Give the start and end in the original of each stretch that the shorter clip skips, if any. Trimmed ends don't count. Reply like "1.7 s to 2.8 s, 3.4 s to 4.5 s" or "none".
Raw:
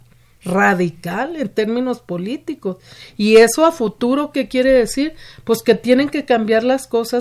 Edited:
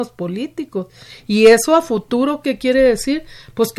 none